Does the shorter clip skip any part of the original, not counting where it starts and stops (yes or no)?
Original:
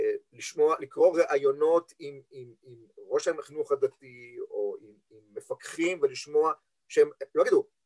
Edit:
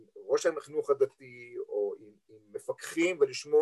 no